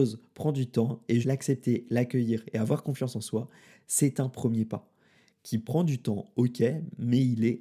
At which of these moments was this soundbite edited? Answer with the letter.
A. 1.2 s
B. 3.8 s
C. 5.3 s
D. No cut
A